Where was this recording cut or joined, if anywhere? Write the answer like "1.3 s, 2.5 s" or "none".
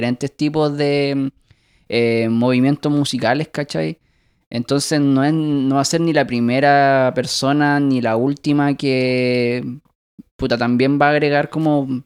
none

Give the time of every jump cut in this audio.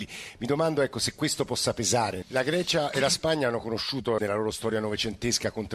2.2 s, 4.2 s

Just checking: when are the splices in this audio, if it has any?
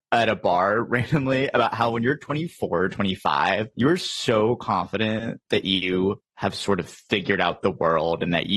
none

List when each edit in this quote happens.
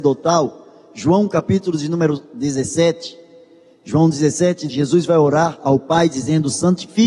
4.7 s

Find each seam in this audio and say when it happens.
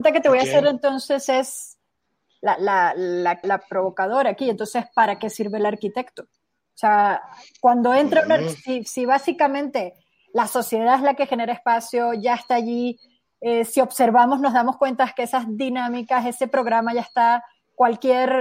3.4 s

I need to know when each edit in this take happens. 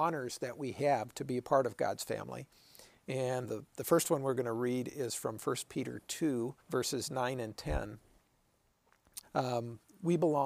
3.4 s, 6.6 s, 9.2 s

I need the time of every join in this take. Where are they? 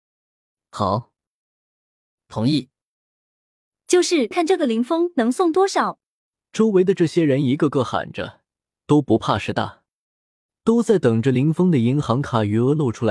4.3 s

